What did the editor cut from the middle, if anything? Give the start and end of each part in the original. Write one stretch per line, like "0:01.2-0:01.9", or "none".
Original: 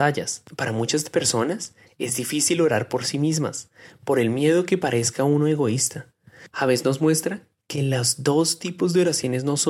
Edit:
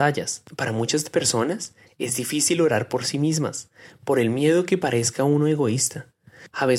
none